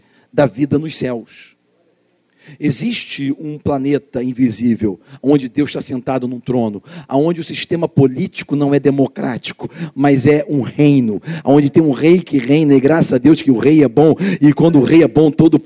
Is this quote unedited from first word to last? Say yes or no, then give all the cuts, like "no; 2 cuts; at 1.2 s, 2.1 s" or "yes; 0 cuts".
yes; 0 cuts